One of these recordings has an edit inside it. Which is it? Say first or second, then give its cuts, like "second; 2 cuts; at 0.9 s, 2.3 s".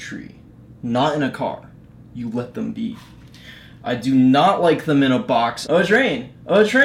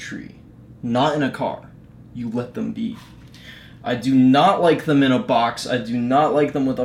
first; 1 cut; at 5.6 s